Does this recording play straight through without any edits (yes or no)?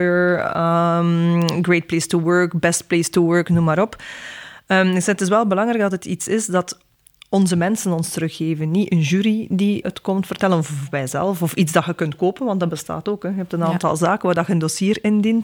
no